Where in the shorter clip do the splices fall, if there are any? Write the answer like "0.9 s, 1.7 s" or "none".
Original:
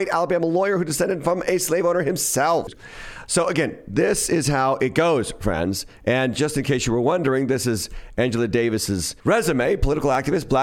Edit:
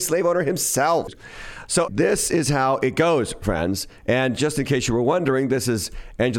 1.8 s